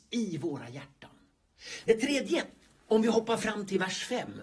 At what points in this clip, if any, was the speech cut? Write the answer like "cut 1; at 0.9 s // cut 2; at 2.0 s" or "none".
cut 1; at 1.8 s

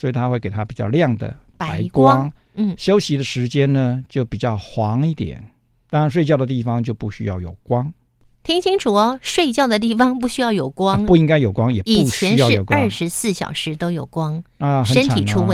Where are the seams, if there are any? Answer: none

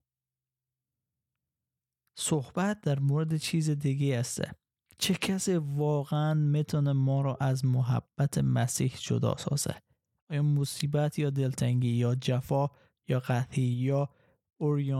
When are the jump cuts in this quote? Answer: none

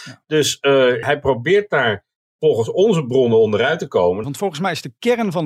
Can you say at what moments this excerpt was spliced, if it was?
cut 1; at 1.0 s // cut 2; at 4.2 s

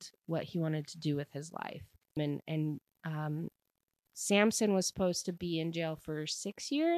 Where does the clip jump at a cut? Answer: cut 1; at 2.2 s

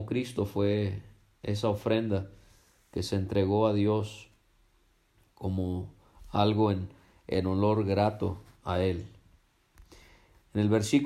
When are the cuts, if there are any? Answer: none

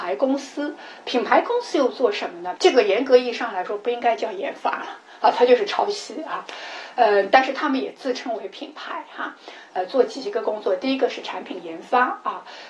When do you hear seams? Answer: cut 1; at 2.6 s // cut 2; at 9.7 s

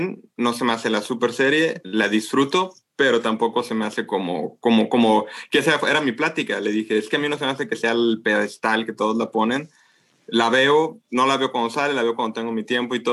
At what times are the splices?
none

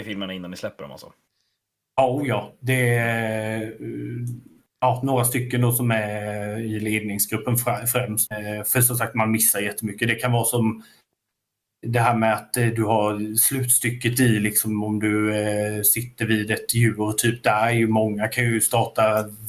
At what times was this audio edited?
cut 1; at 8.3 s

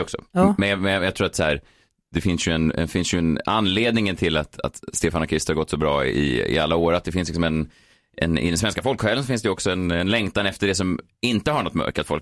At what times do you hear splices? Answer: none

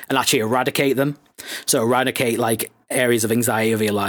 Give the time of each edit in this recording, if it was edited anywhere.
none

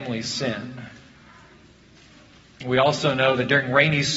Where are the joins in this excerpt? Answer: none

